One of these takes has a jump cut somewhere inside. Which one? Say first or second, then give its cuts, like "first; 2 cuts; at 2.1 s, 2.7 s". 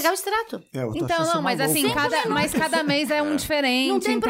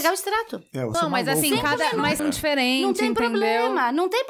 second; 2 cuts; at 0.9 s, 2.2 s